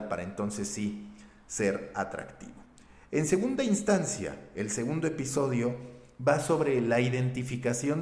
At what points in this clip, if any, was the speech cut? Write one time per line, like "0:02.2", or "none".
none